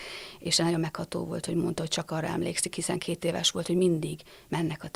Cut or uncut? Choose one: uncut